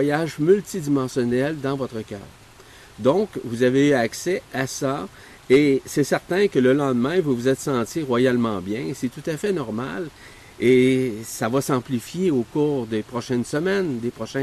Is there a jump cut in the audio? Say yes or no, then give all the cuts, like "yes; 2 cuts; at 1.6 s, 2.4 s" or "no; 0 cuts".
no; 0 cuts